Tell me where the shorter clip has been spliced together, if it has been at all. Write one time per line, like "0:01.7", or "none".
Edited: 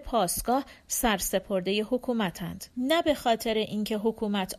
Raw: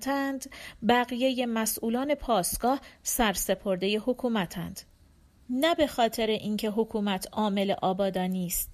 0:02.7